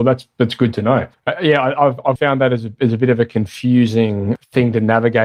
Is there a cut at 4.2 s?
no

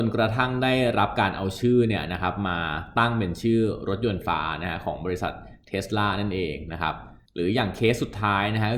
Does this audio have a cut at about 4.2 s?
yes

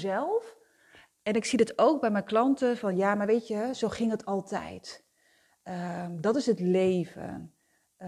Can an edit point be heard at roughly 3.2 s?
no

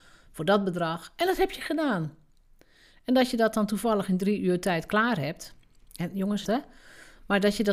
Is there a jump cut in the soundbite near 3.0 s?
no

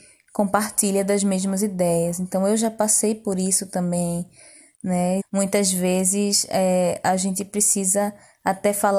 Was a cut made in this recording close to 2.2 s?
no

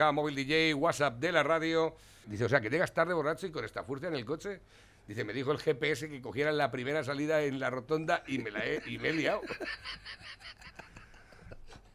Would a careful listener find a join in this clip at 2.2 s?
yes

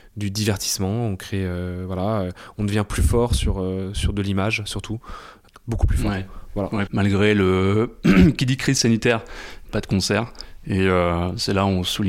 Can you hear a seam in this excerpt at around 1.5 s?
no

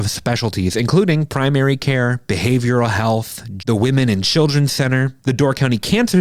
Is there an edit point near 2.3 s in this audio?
no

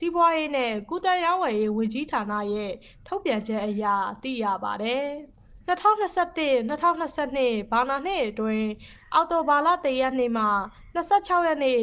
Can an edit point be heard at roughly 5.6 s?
yes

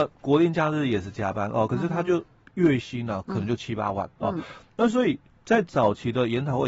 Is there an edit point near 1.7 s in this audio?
no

